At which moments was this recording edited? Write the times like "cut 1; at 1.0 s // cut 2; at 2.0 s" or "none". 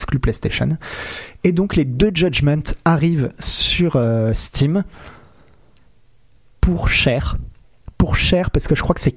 none